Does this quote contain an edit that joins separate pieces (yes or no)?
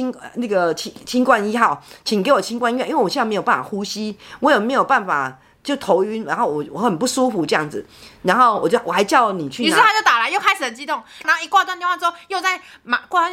yes